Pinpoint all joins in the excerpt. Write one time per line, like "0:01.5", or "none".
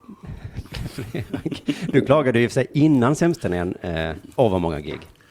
0:04.3